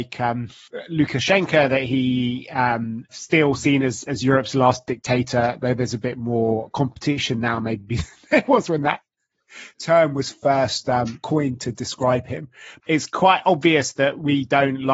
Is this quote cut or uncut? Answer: cut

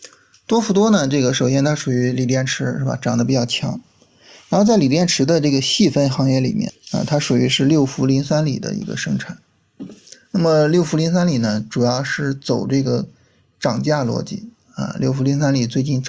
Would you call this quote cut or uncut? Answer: cut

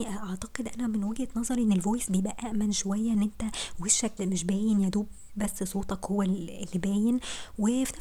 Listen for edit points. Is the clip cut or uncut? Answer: cut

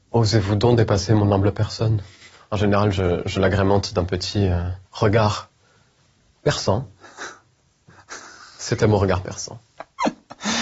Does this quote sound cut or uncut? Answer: cut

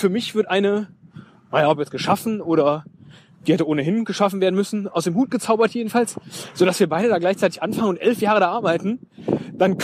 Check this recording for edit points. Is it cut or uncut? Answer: uncut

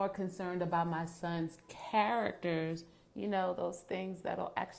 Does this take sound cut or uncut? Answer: uncut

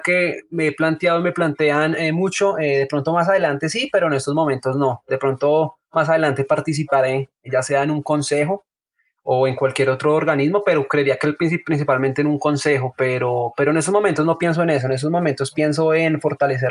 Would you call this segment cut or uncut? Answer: uncut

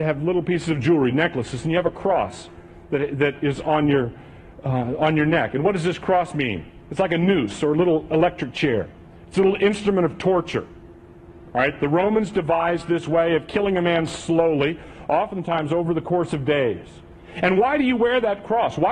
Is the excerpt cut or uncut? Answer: uncut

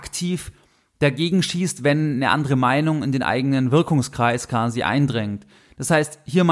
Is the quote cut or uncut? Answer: uncut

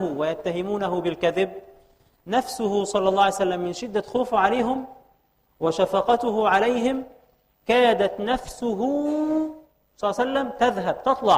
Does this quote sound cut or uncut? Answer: uncut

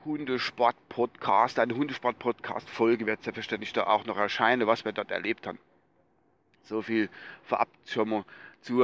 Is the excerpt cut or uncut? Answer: uncut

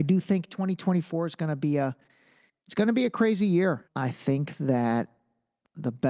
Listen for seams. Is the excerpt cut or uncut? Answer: cut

